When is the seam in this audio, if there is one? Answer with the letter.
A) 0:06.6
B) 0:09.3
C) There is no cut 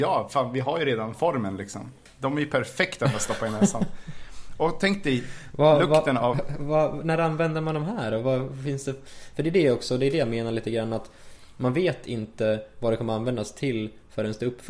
C